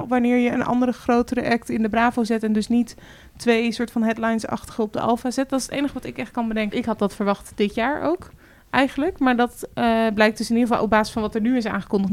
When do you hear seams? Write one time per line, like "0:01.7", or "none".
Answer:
0:06.7